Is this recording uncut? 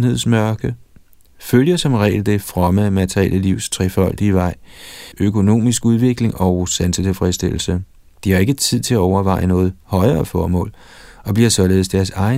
no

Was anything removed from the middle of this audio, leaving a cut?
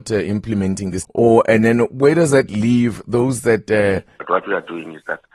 yes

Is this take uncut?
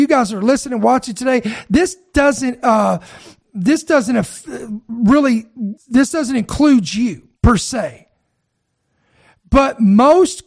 no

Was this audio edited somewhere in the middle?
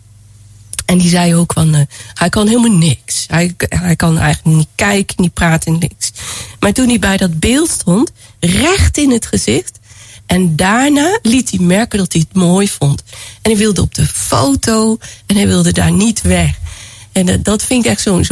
yes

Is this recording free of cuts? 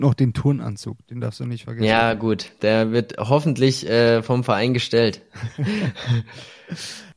yes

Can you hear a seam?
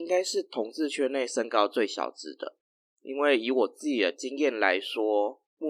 no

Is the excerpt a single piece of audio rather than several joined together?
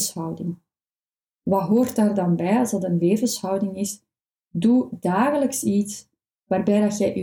yes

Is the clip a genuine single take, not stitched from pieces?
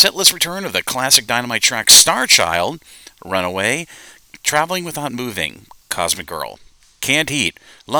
yes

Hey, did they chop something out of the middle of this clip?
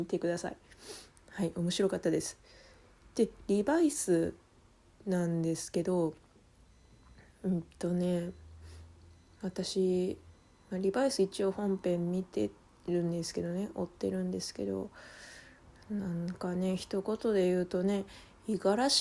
no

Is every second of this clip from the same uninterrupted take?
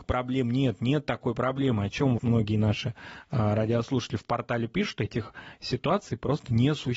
no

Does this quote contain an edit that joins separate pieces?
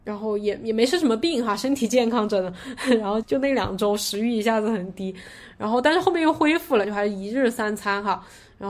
yes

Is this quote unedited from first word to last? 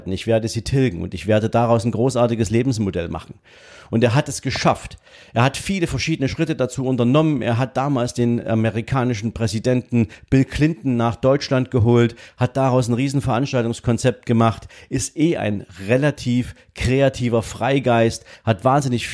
yes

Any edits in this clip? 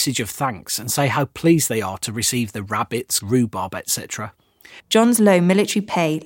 yes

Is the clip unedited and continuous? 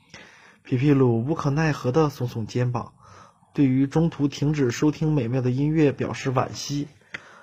yes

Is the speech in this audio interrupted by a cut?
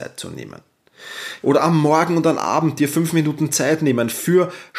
yes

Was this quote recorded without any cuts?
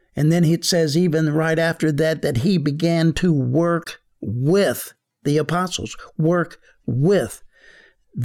yes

